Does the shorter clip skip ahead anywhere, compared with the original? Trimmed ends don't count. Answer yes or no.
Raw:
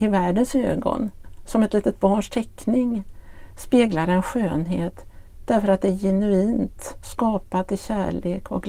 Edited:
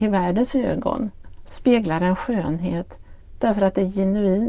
yes